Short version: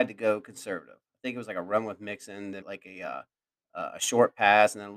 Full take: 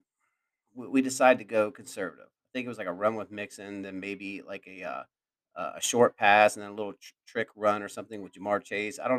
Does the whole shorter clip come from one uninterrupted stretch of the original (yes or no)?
no